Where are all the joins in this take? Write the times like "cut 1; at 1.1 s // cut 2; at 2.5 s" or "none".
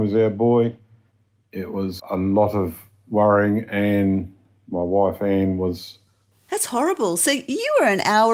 cut 1; at 2.0 s // cut 2; at 6.3 s